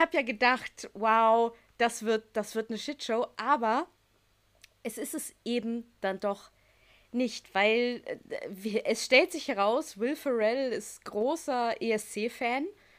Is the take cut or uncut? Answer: uncut